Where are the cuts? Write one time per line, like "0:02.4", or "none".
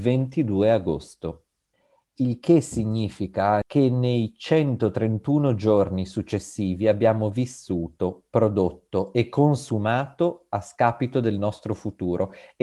0:03.6

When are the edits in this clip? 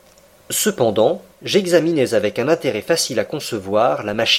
0:01.3

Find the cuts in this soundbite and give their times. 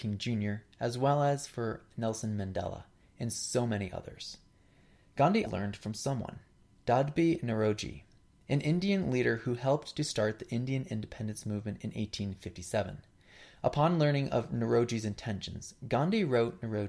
0:05.5

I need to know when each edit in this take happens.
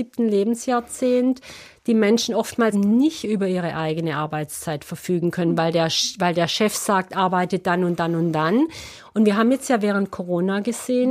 0:02.7

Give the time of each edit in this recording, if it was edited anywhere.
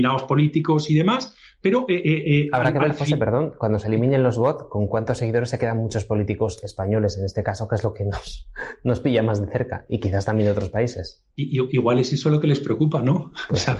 0:11.3

